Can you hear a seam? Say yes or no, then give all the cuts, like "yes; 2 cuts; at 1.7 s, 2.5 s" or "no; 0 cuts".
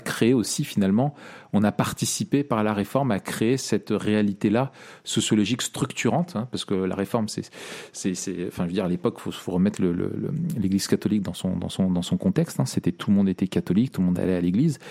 no; 0 cuts